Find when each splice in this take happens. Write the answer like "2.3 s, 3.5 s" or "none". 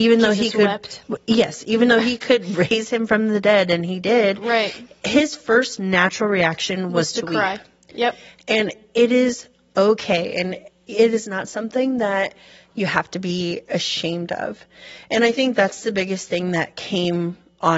none